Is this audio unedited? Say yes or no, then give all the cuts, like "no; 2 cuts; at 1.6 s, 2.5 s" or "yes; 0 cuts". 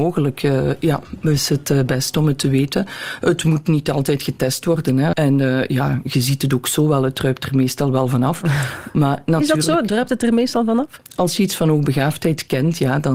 no; 1 cut; at 5.1 s